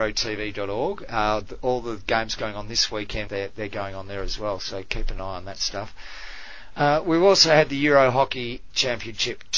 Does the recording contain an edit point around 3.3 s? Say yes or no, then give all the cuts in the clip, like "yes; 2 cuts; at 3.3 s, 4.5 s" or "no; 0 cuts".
yes; 1 cut; at 3.3 s